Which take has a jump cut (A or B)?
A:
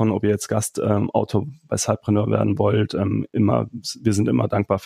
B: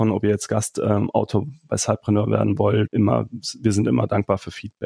B